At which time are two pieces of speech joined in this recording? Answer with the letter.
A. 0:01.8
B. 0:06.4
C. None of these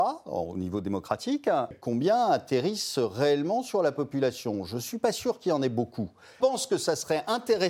B